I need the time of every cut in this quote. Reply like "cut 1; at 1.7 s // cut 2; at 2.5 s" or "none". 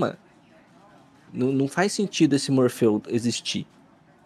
cut 1; at 1.3 s